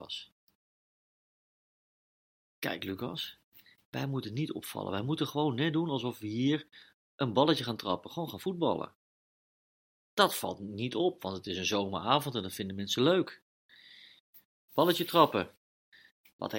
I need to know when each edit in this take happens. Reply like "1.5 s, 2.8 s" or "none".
14.7 s